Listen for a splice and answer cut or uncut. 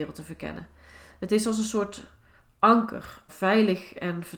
cut